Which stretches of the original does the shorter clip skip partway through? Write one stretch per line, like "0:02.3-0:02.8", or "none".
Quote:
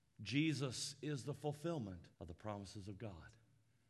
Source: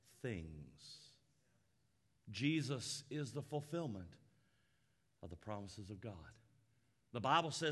0:04.2-0:05.1